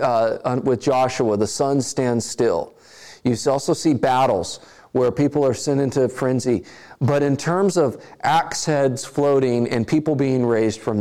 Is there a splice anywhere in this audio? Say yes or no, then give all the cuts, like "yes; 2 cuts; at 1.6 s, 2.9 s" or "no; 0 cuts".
no; 0 cuts